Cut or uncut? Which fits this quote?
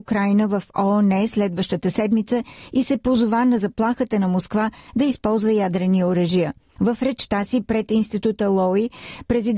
cut